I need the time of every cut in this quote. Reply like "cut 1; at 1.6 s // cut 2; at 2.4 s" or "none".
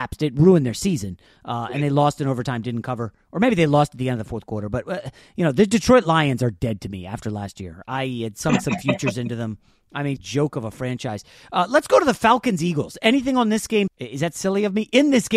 cut 1; at 10.2 s // cut 2; at 13.9 s